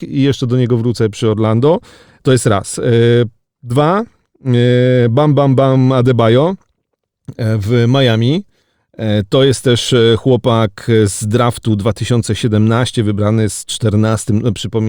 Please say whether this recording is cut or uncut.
uncut